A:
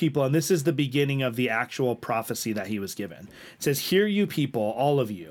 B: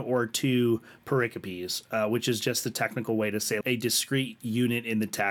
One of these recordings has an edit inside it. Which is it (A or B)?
B